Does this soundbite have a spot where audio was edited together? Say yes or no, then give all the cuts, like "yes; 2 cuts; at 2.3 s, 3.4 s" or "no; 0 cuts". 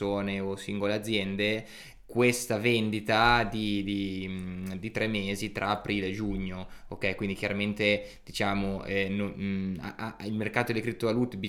yes; 1 cut; at 4.9 s